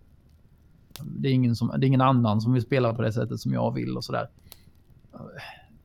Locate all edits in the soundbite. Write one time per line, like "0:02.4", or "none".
0:01.0